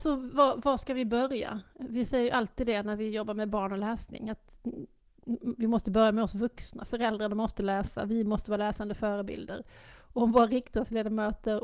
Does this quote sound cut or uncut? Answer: uncut